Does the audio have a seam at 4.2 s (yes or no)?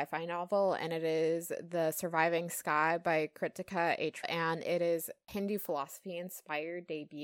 yes